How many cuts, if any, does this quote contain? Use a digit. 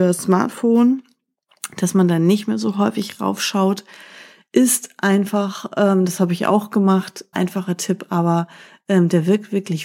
1